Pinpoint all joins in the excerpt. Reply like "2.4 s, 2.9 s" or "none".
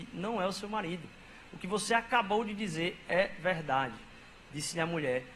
none